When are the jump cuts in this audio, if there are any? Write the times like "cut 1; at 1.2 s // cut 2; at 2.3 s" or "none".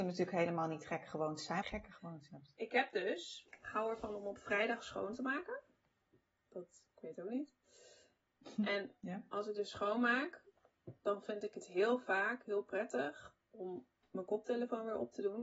cut 1; at 1.6 s